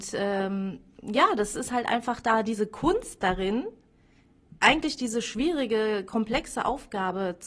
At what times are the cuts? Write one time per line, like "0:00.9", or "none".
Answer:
none